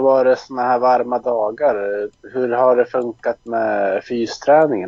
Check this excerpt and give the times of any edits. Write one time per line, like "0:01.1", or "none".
none